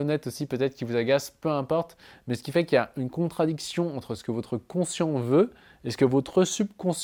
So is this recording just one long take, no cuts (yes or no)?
yes